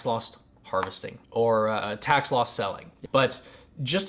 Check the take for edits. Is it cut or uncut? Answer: cut